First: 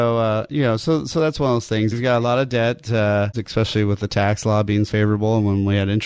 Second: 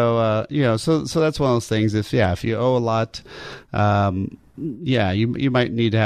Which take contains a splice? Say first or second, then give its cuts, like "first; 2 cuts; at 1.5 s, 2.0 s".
first; 3 cuts; at 1.9 s, 3.3 s, 4.9 s